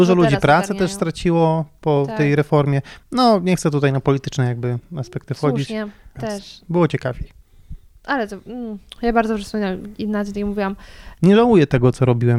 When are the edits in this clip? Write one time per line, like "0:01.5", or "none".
0:06.2
0:11.2